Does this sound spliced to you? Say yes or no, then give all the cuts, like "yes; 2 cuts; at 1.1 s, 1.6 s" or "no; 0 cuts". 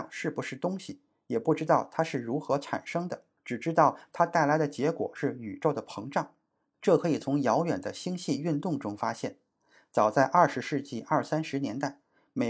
no; 0 cuts